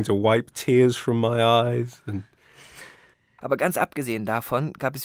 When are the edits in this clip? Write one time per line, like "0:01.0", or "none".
0:03.4